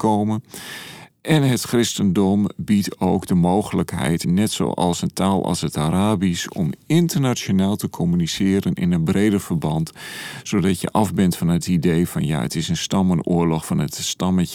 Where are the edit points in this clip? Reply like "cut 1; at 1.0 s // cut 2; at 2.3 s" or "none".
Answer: cut 1; at 4.2 s